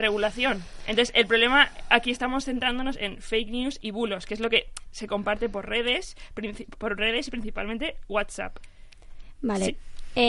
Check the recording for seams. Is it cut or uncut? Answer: uncut